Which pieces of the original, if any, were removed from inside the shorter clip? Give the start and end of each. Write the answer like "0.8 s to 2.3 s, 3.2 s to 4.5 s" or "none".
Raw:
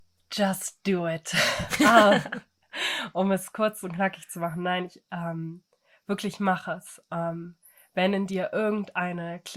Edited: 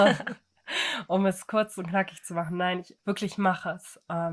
5.0 s to 6.0 s